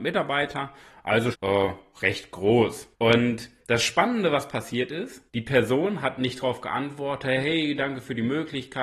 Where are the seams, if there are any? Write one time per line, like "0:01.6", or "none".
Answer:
0:01.3
0:02.9
0:05.3